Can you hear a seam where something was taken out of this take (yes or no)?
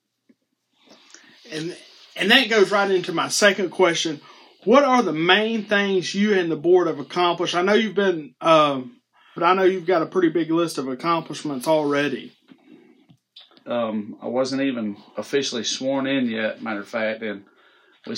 yes